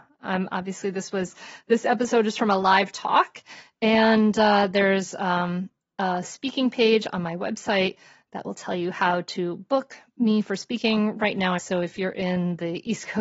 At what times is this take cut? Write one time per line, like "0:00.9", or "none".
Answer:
0:11.6